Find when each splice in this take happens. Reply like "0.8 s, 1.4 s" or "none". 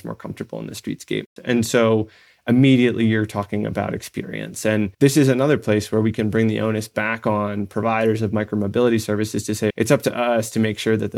1.4 s, 9.7 s